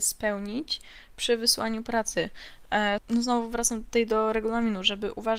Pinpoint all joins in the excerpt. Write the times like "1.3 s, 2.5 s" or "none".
3.0 s